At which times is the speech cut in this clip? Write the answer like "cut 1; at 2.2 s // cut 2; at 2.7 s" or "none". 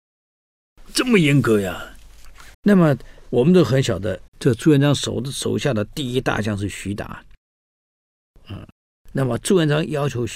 cut 1; at 2.5 s // cut 2; at 4.3 s